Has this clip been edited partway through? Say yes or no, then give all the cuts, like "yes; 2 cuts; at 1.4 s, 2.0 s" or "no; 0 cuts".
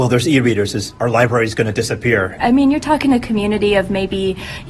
yes; 1 cut; at 2.4 s